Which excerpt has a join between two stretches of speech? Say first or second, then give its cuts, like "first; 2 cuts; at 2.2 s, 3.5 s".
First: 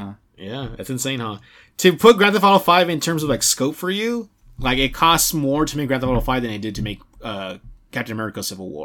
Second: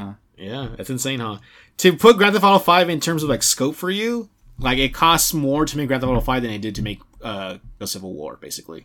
second; 1 cut; at 7.8 s